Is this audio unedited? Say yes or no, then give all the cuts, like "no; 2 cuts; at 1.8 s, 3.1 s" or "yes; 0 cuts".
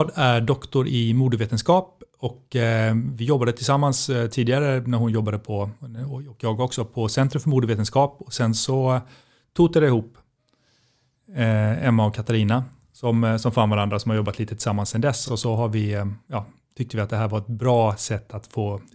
yes; 0 cuts